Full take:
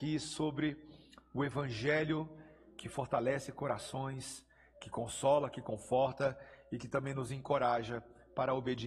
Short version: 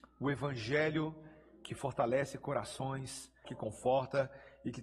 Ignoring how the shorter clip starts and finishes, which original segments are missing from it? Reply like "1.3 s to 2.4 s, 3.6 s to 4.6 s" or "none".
4.6 s to 5.5 s